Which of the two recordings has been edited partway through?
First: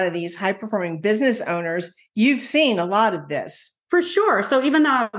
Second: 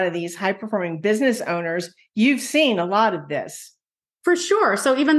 first; 1 cut; at 3.8 s

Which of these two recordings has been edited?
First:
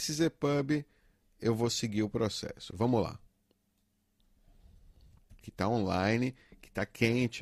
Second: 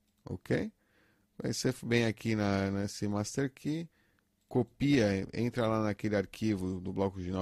first; 2 cuts; at 2.7 s, 5.4 s

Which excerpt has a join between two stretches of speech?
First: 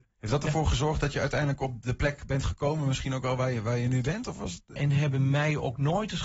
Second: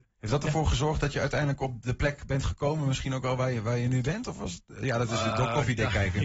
first; 1 cut; at 4.8 s

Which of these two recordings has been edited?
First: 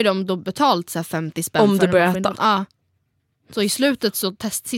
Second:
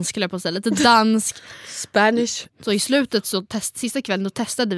second; 1 cut; at 2.5 s

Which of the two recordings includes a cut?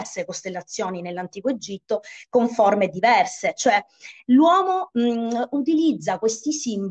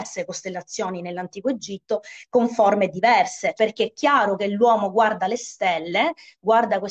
second; 1 cut; at 3.6 s

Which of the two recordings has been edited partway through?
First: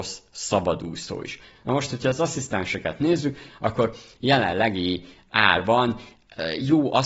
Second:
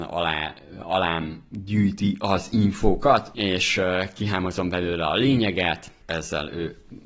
second; 2 cuts; at 3.3 s, 6.0 s

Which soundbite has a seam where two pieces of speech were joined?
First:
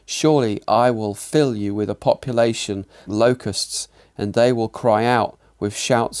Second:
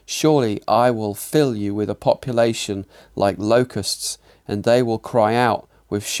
first; 1 cut; at 3.1 s

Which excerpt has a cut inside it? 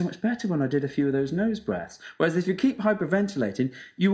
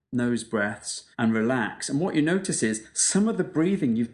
second; 1 cut; at 1.1 s

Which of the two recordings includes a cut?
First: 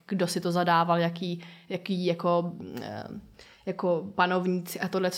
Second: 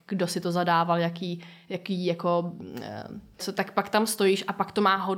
second; 1 cut; at 3.4 s

